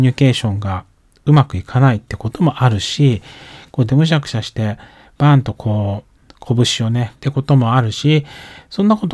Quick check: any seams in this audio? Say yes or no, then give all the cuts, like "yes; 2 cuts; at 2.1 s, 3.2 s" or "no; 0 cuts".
yes; 2 cuts; at 3.9 s, 7.1 s